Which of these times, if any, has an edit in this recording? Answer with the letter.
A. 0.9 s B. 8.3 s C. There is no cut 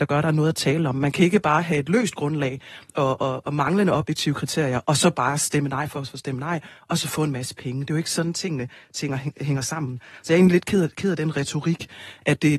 C